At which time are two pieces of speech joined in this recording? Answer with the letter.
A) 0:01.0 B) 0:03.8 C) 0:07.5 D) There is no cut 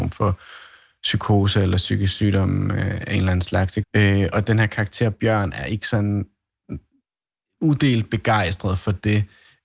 B